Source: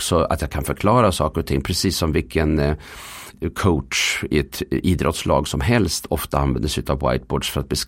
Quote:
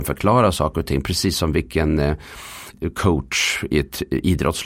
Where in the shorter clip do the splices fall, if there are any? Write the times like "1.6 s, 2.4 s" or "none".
none